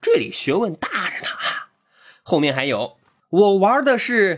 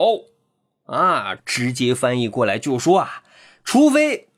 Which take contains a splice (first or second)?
second